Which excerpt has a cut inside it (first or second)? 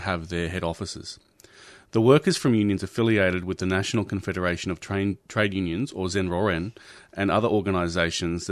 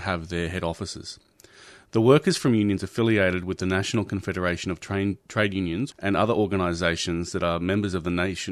second